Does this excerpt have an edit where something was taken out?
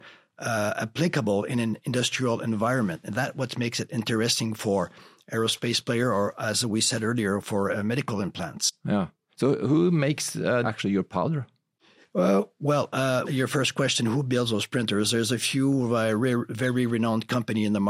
yes; 2 cuts; at 10.6 s, 13.2 s

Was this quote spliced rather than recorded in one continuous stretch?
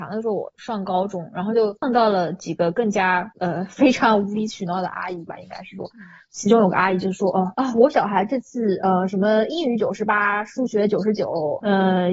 no; 0 cuts

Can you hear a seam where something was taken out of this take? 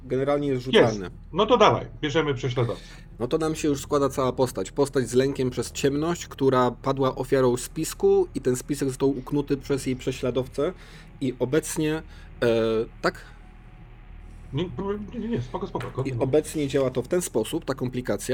no; 0 cuts

